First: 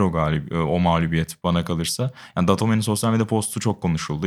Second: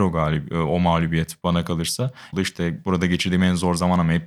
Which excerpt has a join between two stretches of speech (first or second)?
second